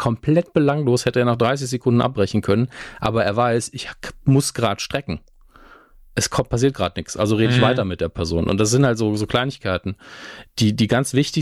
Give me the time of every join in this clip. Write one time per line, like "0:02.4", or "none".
none